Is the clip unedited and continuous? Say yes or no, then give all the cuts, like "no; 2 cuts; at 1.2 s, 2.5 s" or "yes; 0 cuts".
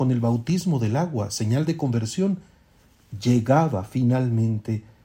yes; 0 cuts